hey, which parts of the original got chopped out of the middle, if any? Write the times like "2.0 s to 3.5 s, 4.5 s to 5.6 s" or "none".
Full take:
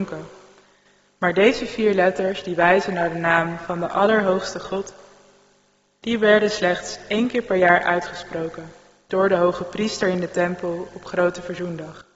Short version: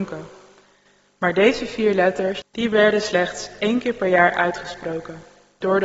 2.4 s to 5.9 s